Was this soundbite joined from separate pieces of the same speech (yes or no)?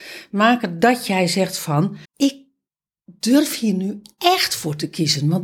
yes